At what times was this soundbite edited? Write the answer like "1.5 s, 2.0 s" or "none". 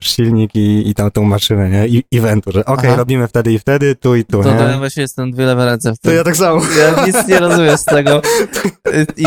none